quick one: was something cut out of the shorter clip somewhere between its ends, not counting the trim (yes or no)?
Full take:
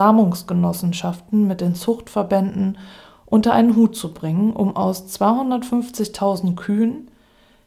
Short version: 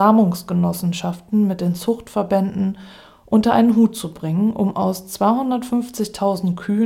no